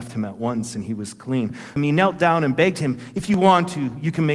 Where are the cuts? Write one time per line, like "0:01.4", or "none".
0:01.8